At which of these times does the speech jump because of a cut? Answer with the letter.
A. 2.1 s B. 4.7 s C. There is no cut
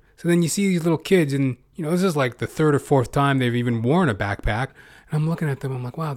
B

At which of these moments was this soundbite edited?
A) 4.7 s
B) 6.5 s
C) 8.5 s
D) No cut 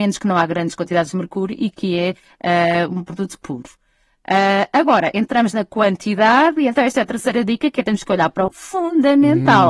C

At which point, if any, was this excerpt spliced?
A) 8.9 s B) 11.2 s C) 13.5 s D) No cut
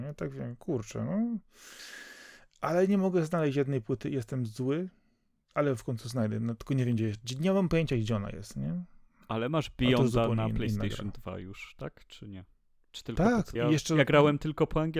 C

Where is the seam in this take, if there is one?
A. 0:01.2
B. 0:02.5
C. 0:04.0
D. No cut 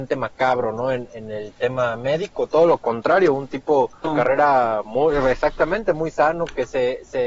C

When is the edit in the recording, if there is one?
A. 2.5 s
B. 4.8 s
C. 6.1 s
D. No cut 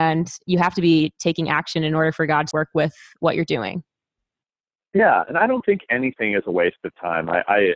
A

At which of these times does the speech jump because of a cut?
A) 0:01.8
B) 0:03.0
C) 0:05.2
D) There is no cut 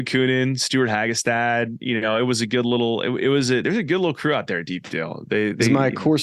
D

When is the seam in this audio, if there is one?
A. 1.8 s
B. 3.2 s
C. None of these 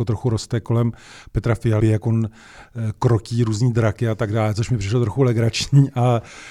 A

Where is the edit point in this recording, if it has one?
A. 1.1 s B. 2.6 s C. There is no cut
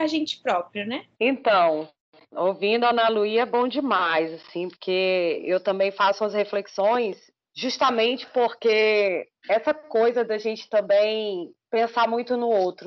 A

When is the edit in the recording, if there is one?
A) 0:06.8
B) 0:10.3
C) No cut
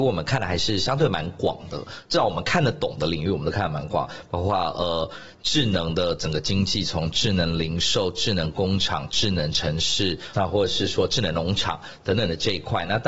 B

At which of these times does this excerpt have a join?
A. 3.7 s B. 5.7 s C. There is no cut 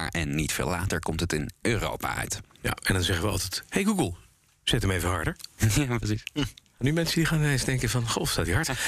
C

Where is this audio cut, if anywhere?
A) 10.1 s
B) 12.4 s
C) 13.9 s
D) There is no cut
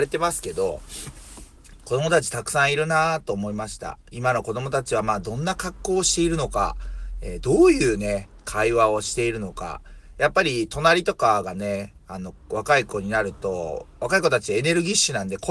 D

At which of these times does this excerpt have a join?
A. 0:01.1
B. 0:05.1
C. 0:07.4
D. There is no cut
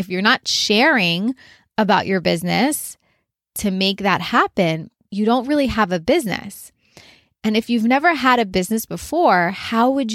B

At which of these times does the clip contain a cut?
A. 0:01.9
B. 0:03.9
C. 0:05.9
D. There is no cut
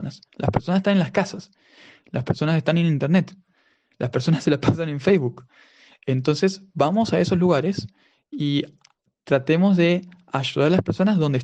D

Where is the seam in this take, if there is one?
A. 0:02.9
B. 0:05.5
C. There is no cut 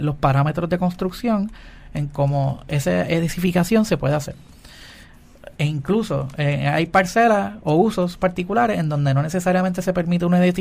B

